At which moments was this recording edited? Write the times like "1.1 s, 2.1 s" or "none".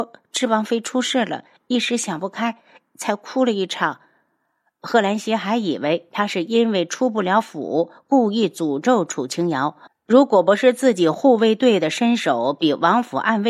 9.9 s